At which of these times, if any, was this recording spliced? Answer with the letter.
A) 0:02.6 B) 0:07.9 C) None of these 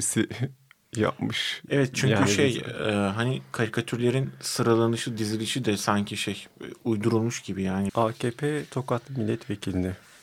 B